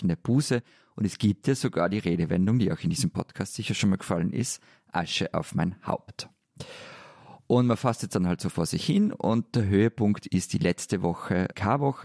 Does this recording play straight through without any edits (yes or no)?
yes